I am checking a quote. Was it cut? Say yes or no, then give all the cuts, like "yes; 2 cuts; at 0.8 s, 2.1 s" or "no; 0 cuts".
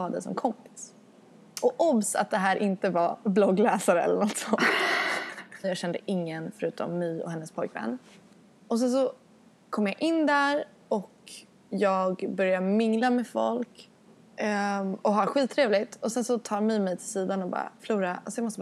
yes; 1 cut; at 5.6 s